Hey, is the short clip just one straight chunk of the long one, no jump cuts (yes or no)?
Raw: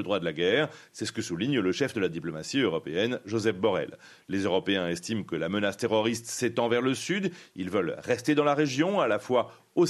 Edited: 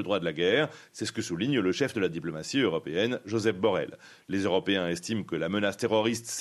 yes